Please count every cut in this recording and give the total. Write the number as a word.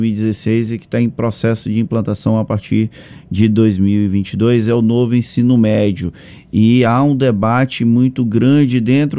zero